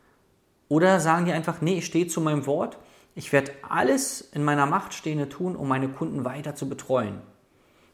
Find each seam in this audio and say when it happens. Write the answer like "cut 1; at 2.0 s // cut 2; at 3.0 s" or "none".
none